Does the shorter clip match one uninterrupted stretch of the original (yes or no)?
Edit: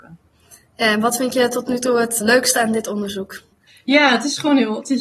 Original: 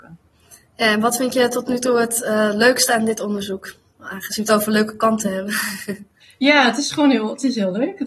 no